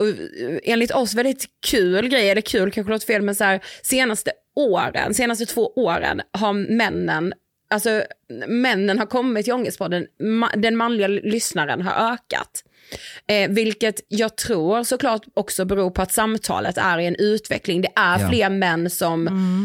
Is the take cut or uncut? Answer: uncut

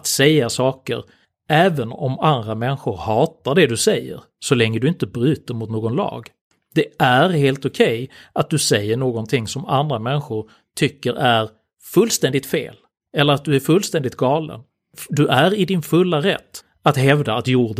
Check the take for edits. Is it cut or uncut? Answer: uncut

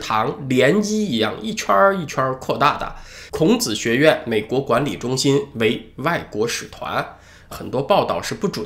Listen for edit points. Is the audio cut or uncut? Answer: cut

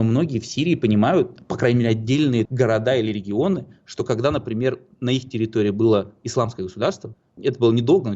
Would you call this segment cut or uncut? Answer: uncut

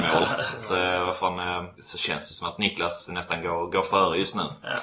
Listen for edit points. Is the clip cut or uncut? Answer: cut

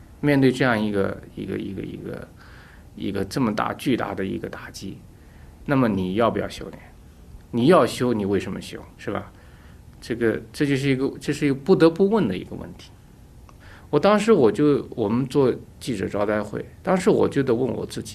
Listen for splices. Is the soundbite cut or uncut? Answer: cut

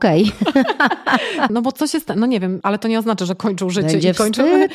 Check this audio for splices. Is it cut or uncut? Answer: cut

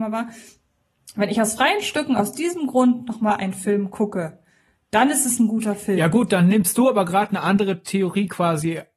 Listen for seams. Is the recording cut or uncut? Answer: uncut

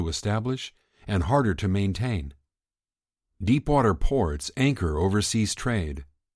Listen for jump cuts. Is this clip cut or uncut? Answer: uncut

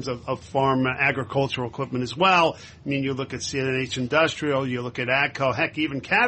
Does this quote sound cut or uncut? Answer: uncut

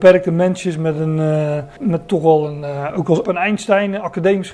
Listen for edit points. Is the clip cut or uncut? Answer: cut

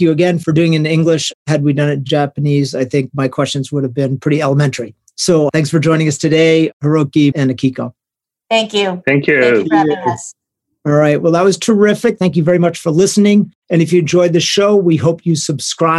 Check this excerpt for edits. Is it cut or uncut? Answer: cut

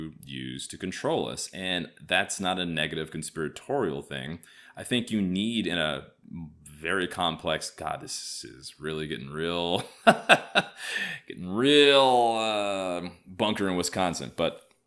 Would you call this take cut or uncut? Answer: uncut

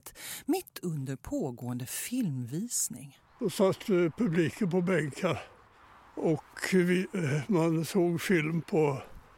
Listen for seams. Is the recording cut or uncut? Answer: uncut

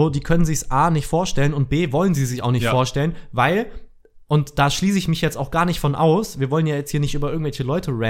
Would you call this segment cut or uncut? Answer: uncut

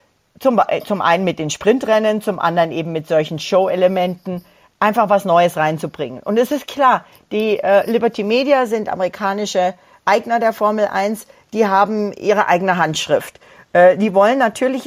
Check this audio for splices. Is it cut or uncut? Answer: uncut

